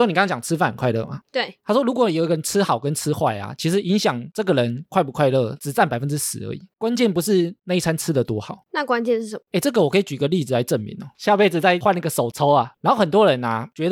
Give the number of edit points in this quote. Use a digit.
2